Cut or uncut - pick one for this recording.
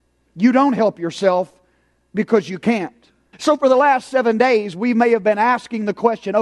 cut